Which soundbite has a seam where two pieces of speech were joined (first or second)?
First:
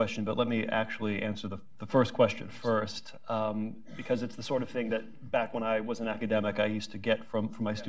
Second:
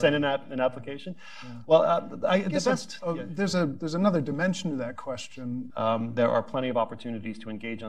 second